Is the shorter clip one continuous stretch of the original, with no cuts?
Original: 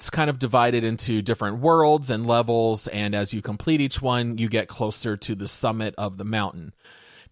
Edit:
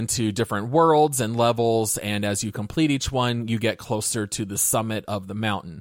yes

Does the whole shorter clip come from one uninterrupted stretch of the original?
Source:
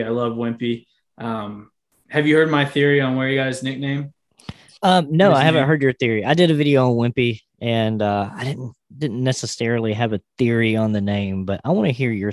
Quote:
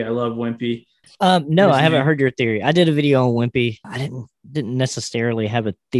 no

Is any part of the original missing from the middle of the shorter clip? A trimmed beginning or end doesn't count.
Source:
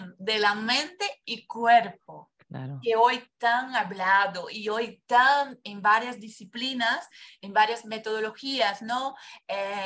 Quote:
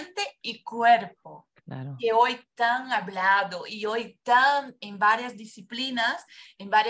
no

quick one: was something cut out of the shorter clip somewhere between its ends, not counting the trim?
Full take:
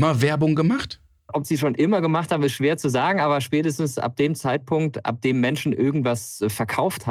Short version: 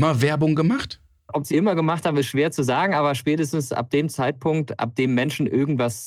yes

